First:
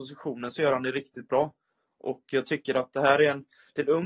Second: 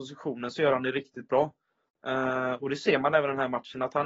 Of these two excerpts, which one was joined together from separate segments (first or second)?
second